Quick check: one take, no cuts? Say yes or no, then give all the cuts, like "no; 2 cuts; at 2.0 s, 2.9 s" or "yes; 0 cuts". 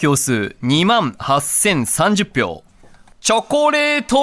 no; 1 cut; at 3.1 s